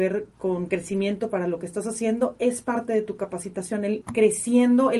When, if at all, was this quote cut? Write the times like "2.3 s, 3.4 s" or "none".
4.0 s